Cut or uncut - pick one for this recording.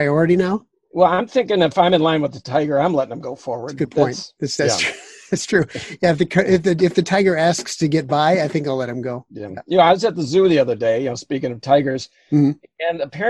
uncut